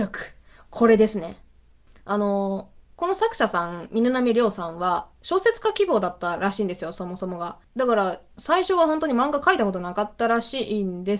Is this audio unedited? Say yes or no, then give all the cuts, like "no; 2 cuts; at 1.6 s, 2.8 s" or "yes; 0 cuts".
yes; 0 cuts